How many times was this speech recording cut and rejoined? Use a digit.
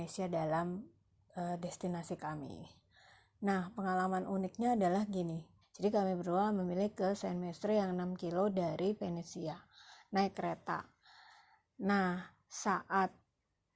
1